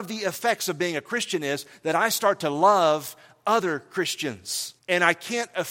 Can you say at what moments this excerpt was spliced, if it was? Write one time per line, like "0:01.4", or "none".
0:04.8